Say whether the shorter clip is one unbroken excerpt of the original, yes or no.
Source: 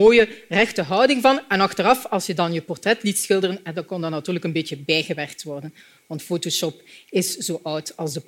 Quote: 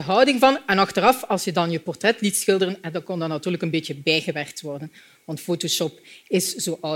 yes